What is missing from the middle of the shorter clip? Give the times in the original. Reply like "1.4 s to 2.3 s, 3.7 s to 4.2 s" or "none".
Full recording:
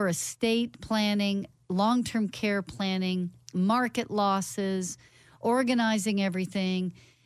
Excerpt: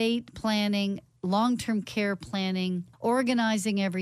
3.4 s to 5.3 s